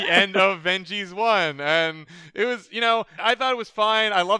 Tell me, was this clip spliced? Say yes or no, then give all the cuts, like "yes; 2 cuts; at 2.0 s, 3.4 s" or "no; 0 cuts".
yes; 1 cut; at 3.2 s